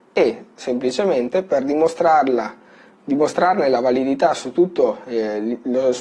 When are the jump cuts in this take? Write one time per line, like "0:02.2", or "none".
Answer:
none

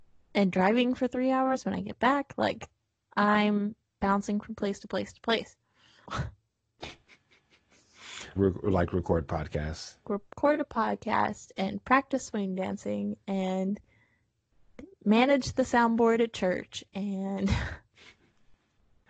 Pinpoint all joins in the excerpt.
0:06.0
0:08.4
0:10.0

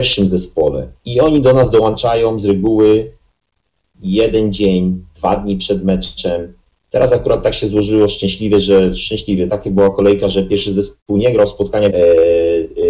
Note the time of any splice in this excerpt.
0:01.0
0:09.5
0:11.9

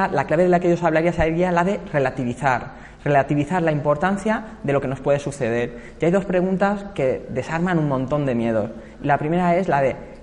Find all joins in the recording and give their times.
none

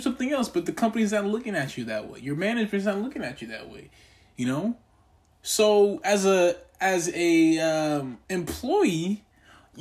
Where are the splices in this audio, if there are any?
none

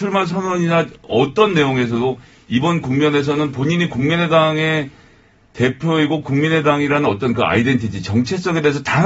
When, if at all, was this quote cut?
none

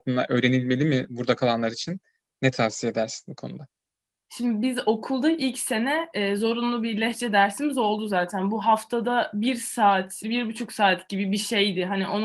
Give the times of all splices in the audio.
0:10.2

